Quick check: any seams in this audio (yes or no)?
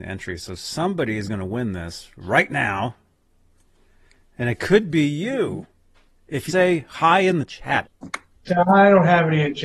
yes